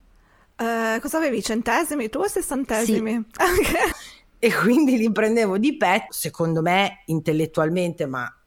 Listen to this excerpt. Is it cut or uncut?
cut